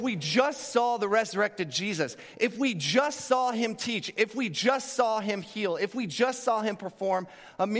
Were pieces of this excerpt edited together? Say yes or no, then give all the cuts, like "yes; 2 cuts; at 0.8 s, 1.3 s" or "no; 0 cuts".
no; 0 cuts